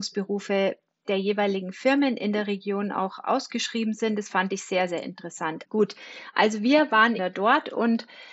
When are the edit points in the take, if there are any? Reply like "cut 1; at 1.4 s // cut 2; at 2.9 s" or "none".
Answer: cut 1; at 5.6 s // cut 2; at 7.2 s